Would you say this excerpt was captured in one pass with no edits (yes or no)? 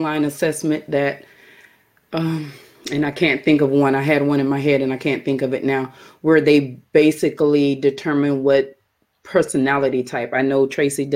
yes